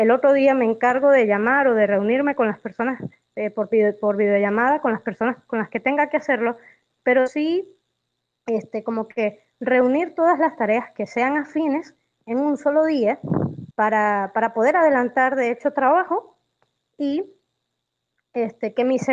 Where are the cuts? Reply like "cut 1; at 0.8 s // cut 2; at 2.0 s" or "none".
cut 1; at 13.7 s